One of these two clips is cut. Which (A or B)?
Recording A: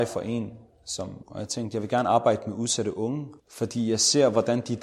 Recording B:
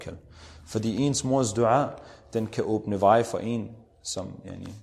A